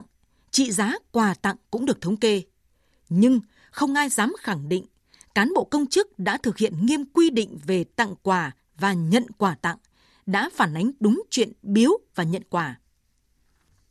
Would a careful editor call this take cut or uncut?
uncut